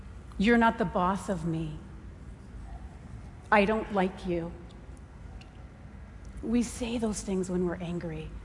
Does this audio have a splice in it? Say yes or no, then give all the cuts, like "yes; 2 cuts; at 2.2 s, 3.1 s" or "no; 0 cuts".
no; 0 cuts